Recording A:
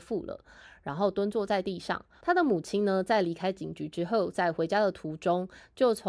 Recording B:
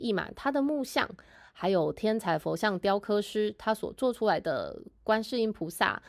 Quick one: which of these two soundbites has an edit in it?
A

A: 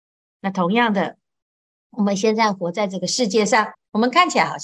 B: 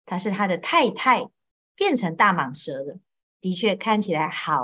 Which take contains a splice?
B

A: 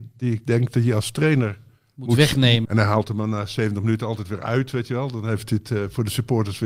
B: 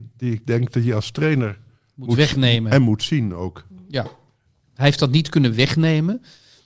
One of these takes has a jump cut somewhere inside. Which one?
A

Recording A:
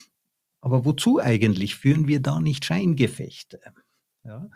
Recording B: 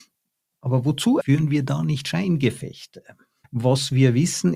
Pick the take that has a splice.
B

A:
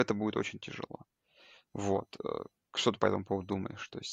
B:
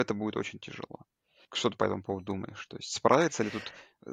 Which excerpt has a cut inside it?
B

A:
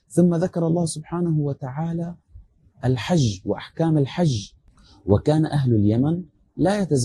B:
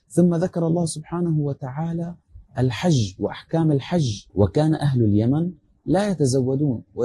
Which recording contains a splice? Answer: B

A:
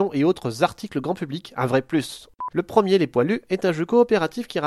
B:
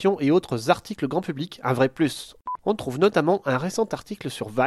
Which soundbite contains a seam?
A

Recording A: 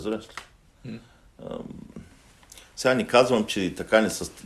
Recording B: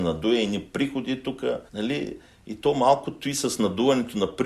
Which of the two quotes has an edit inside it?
B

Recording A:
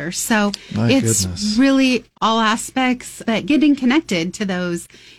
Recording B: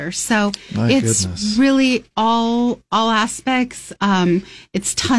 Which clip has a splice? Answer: A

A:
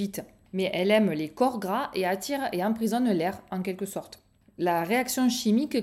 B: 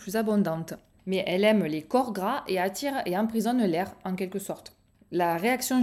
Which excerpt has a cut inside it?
B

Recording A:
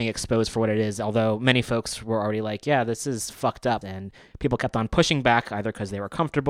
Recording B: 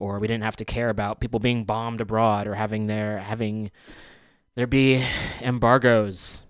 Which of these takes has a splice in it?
A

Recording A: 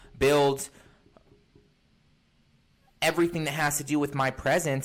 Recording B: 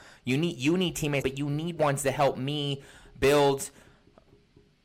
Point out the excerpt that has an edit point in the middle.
B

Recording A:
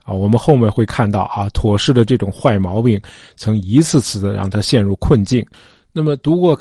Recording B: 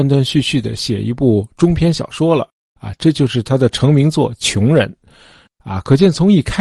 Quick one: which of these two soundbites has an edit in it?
B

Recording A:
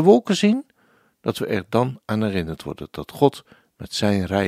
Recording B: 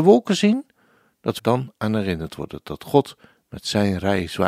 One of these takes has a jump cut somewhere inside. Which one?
B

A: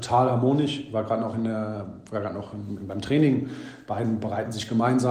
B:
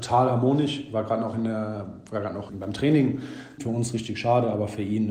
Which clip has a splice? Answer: B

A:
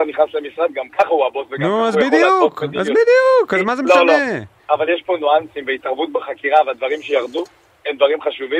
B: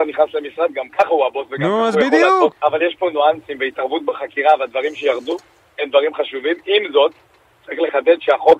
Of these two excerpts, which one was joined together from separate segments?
B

